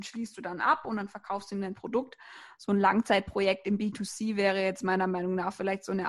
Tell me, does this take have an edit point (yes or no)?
no